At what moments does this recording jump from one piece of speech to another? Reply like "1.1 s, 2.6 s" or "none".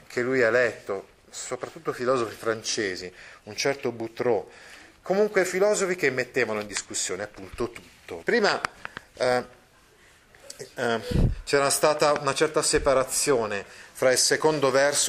8.2 s